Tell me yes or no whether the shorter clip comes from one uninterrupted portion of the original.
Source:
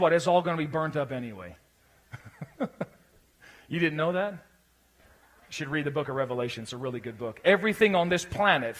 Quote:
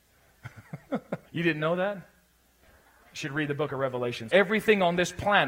no